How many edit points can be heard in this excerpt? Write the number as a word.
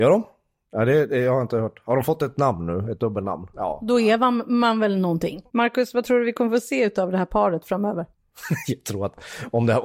three